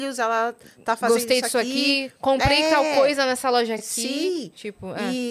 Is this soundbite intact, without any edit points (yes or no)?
yes